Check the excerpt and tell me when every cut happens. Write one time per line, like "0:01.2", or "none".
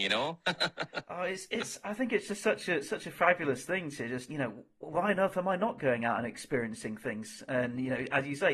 0:04.3